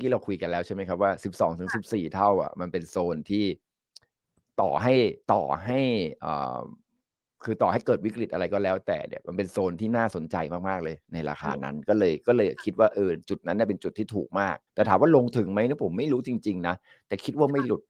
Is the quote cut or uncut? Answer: cut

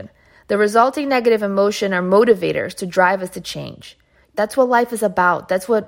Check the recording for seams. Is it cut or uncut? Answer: cut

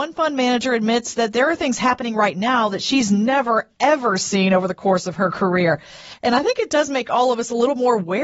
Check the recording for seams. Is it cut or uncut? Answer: uncut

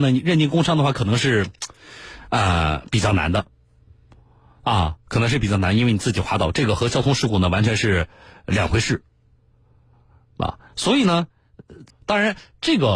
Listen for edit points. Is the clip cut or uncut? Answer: cut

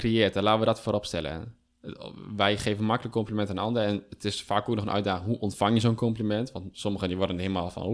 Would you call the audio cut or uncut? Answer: uncut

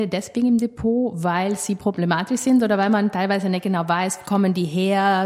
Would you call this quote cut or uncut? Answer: uncut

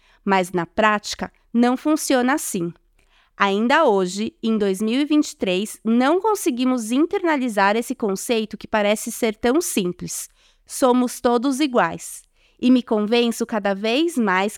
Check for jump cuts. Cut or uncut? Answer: uncut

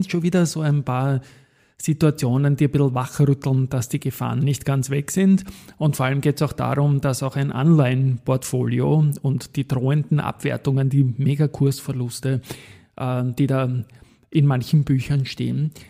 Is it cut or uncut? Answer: uncut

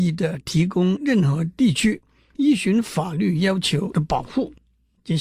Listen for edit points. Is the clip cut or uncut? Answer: uncut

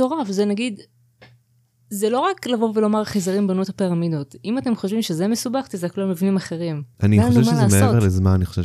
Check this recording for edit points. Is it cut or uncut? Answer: cut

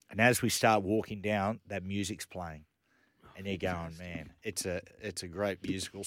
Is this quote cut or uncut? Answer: uncut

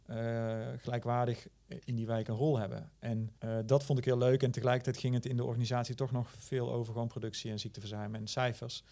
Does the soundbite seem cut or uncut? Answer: cut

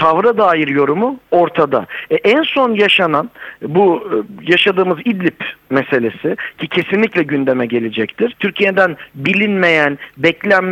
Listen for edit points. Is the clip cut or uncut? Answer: cut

